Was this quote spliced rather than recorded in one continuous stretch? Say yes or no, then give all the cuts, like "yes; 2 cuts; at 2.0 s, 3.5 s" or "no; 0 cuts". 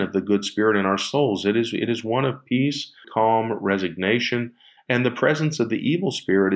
yes; 1 cut; at 3.0 s